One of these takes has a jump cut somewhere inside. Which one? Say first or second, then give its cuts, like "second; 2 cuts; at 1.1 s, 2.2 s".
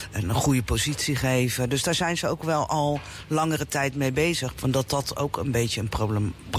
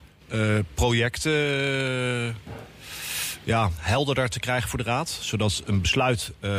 first; 1 cut; at 4.5 s